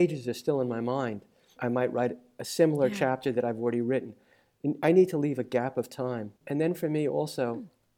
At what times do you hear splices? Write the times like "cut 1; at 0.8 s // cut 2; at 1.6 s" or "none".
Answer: cut 1; at 6.4 s